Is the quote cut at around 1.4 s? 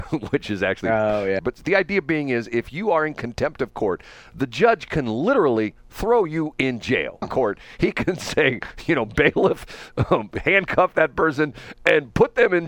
yes; 2 cuts; at 1.4 s, 7.2 s

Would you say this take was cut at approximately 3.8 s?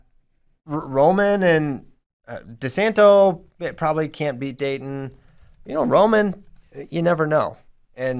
no; 0 cuts

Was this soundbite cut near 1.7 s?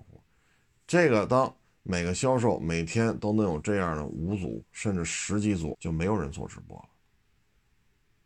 no; 2 cuts; at 4.6 s, 5.7 s

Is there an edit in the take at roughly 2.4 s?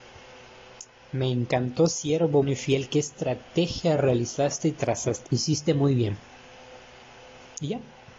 yes; 2 cuts; at 2.4 s, 5.3 s

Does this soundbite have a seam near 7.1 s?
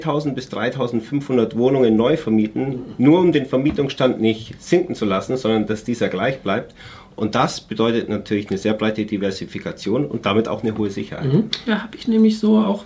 no; 1 cut; at 11.7 s

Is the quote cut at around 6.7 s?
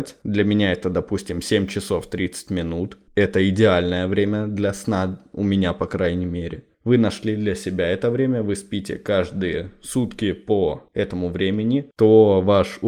yes; 1 cut; at 6.7 s

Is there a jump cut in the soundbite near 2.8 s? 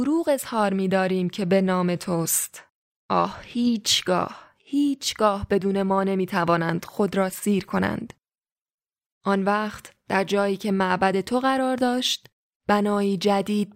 no; 1 cut; at 9.1 s

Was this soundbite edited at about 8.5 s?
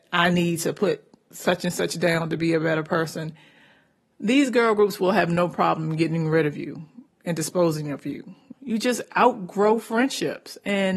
yes; 1 cut; at 8.5 s

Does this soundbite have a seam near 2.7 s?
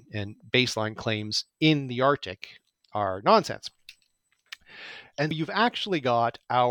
yes; 2 cuts; at 2.7 s, 5.3 s

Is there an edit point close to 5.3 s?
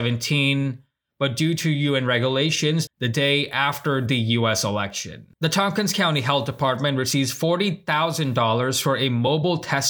yes; 2 cuts; at 2.9 s, 5.3 s

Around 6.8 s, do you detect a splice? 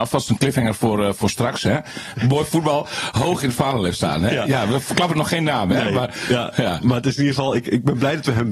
no; 1 cut; at 2.1 s

